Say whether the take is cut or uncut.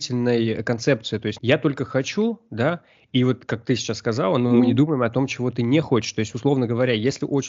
cut